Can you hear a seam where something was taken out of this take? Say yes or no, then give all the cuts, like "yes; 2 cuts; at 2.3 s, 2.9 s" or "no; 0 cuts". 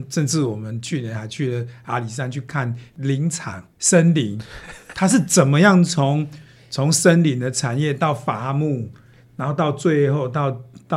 yes; 1 cut; at 3.7 s